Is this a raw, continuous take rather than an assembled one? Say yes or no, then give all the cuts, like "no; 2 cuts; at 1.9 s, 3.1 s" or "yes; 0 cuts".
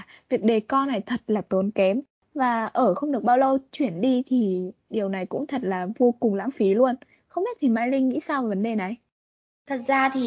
yes; 0 cuts